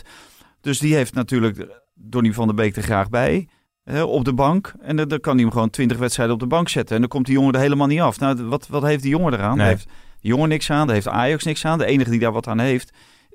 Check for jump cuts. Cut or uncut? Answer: uncut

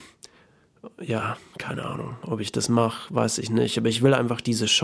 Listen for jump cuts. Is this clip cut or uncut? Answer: uncut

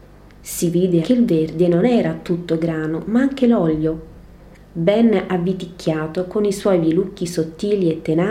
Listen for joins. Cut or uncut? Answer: cut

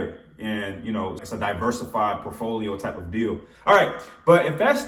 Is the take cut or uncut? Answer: cut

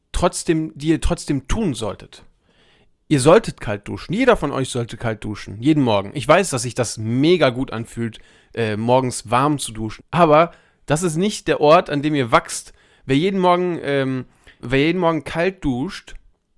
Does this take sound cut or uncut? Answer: cut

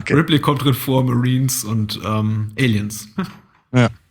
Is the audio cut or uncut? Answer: cut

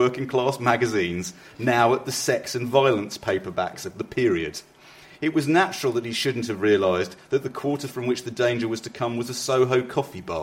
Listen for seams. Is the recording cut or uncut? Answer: uncut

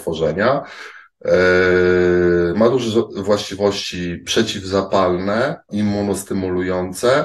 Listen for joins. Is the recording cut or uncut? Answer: cut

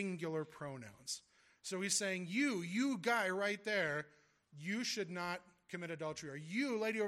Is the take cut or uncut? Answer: uncut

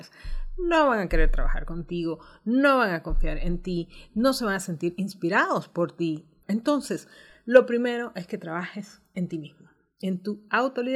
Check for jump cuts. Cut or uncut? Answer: cut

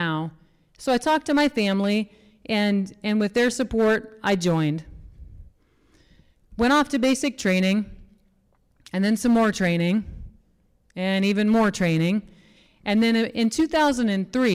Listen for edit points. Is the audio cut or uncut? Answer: uncut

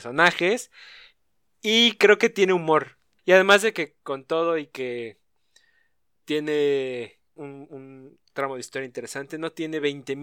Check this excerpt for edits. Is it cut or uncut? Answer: cut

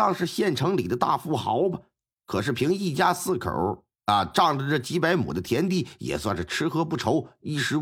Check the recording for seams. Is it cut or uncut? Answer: uncut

